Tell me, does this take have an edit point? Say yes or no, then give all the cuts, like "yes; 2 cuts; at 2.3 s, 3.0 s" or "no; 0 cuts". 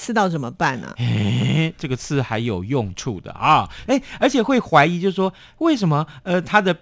yes; 1 cut; at 3.9 s